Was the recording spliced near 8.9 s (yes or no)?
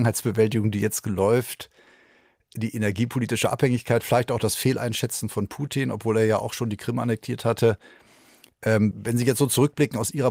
yes